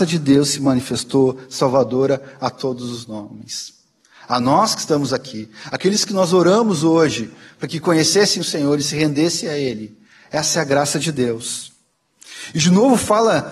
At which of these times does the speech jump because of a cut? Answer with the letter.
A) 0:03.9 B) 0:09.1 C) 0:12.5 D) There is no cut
D